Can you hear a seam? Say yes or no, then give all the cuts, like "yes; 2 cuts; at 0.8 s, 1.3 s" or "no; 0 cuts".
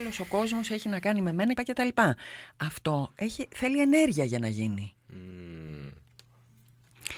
yes; 1 cut; at 1.5 s